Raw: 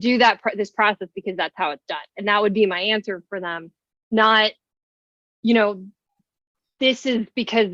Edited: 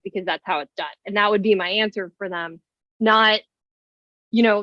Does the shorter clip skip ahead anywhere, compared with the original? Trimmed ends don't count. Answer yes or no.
no